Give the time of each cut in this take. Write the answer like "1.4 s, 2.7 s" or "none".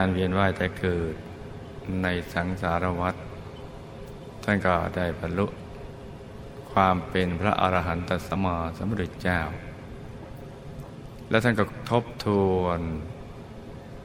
8.4 s